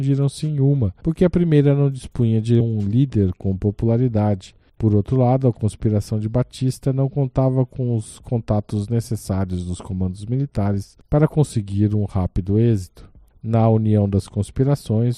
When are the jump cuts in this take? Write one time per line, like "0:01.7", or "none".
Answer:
none